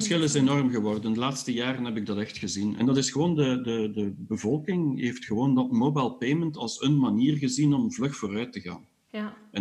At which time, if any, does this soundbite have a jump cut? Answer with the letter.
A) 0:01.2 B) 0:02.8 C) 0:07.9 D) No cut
B